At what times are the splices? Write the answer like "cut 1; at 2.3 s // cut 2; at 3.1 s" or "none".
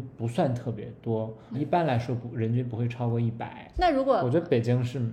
cut 1; at 1.5 s // cut 2; at 3.7 s